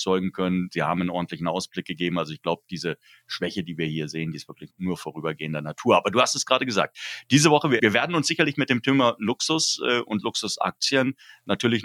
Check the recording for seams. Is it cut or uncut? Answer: cut